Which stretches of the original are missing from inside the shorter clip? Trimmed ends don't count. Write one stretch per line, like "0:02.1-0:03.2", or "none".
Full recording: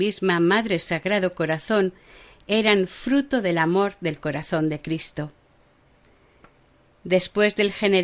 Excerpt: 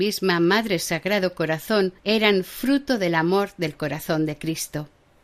0:02.0-0:02.4